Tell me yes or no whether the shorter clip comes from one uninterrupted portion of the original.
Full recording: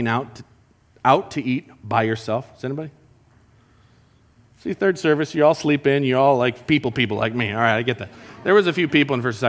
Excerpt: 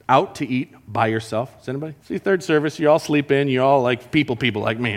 no